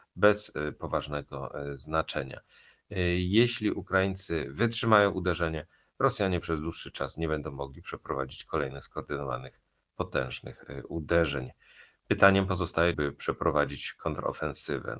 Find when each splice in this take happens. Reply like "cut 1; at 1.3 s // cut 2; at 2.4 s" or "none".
cut 1; at 12.9 s